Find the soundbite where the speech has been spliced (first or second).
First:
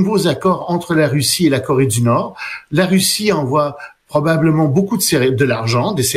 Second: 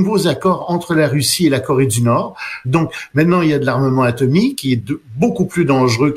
second